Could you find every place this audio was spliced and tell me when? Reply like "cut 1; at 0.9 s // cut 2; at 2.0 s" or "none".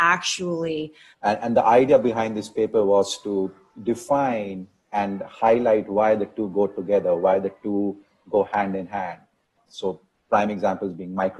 cut 1; at 1.1 s // cut 2; at 9.6 s